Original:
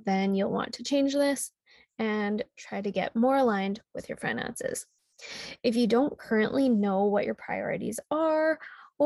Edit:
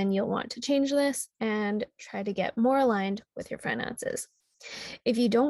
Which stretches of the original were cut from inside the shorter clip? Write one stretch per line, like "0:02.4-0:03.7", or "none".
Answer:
0:01.6-0:01.9

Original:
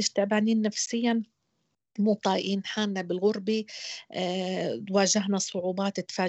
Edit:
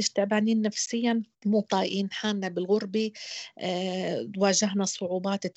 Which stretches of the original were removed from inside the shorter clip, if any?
0:01.3-0:01.9

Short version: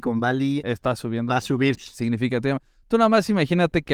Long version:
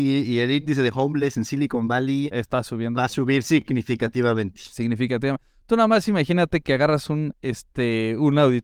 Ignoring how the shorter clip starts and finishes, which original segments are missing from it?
0:03.4-0:04.5

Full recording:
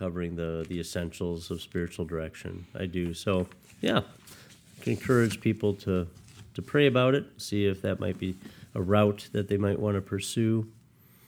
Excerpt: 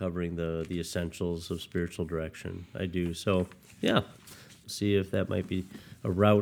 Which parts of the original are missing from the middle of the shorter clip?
0:04.6-0:07.3

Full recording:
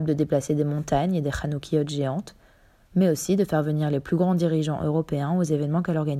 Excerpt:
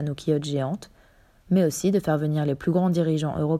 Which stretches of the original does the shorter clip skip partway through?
none

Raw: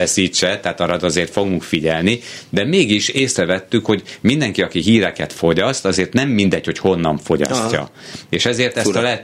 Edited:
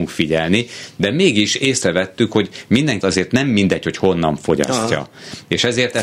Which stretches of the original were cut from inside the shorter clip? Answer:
0:04.5-0:05.8

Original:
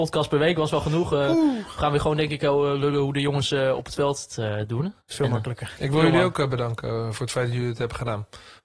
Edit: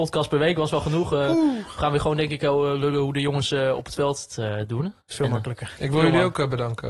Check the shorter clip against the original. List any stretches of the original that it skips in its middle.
none

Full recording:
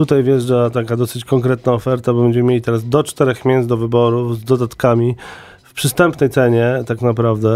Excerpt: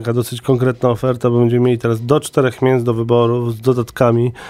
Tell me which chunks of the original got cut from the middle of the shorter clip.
none

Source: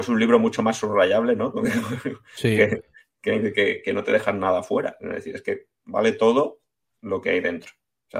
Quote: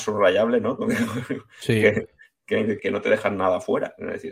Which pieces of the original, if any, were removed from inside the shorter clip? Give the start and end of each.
0:03.5-0:03.8

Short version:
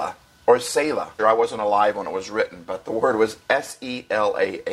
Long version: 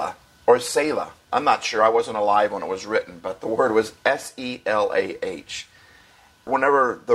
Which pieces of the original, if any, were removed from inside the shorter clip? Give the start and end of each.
0:01.2-0:01.7

